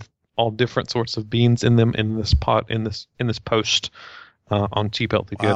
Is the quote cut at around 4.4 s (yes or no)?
no